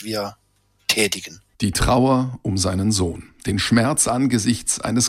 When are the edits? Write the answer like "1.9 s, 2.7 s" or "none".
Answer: none